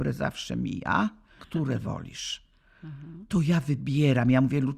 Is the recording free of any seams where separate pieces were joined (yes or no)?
no